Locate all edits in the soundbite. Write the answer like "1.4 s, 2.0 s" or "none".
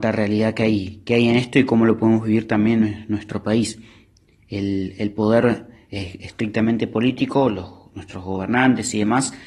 none